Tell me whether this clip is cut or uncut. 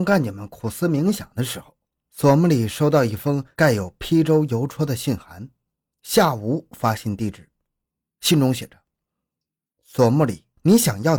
uncut